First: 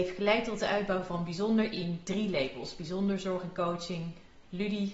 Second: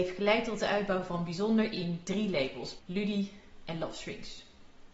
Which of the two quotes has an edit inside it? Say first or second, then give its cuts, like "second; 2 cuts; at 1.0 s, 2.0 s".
second; 1 cut; at 2.8 s